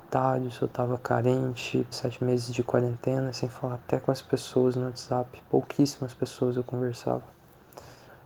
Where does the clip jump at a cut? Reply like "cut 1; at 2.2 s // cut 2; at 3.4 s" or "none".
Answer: cut 1; at 1.9 s

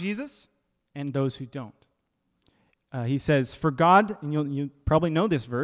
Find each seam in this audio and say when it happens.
none

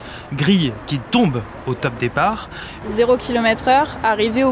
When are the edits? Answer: cut 1; at 2.8 s

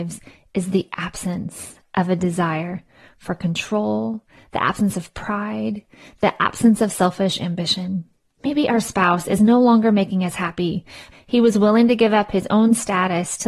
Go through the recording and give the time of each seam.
cut 1; at 8.4 s // cut 2; at 11.1 s

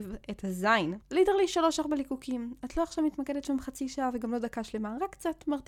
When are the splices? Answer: cut 1; at 1.0 s

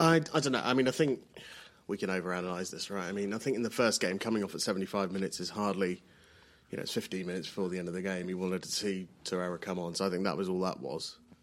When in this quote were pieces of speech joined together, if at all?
none

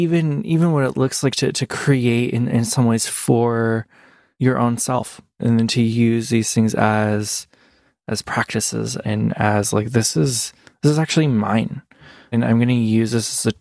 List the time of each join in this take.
cut 1; at 9.0 s

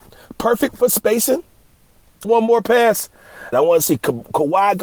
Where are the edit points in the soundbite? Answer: cut 1; at 2.2 s // cut 2; at 3.5 s

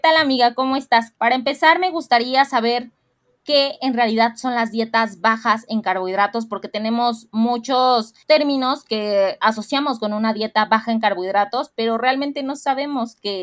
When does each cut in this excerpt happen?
cut 1; at 1.1 s

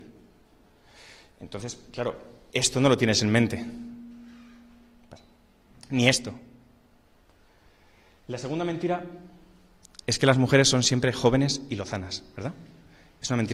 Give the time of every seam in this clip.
none

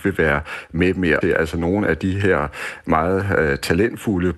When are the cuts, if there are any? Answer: cut 1; at 1.2 s

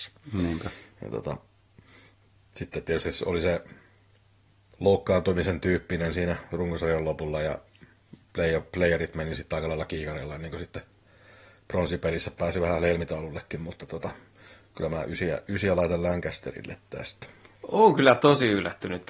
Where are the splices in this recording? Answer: none

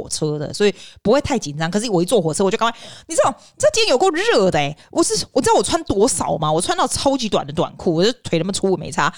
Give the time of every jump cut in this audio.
none

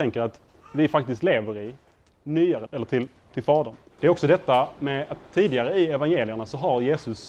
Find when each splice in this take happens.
cut 1; at 2.7 s // cut 2; at 4.0 s

